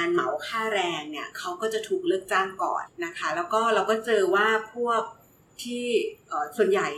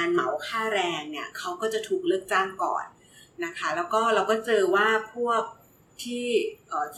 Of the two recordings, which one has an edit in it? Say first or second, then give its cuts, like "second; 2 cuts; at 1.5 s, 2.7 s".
first; 1 cut; at 2.9 s